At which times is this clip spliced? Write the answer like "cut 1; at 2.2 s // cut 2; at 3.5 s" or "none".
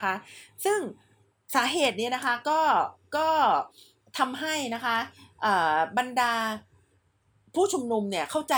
none